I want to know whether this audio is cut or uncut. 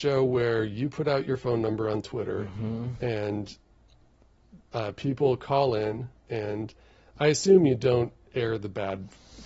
uncut